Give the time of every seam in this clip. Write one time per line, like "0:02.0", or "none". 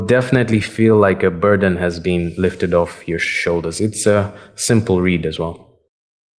none